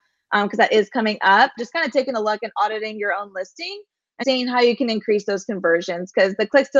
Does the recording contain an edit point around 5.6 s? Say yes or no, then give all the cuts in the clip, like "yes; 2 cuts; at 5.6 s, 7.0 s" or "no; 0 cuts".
no; 2 cuts; at 1.6 s, 4.2 s